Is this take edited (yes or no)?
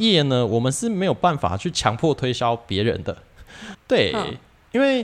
yes